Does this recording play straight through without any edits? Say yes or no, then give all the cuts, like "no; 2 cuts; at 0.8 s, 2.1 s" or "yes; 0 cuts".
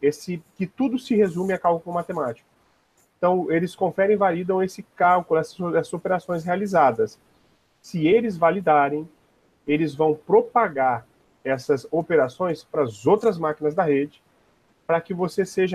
yes; 0 cuts